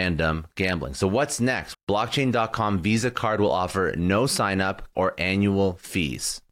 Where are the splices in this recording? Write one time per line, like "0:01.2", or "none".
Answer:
0:01.7
0:04.9